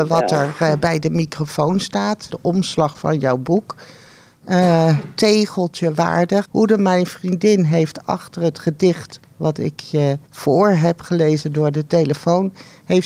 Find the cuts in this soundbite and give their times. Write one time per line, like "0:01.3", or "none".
0:02.3
0:06.4
0:10.2